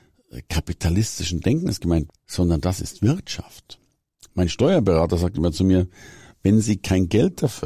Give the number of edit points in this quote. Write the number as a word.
one